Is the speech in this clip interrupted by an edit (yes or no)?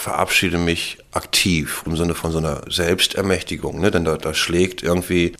no